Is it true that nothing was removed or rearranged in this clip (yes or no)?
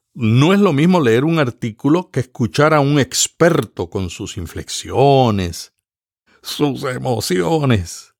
no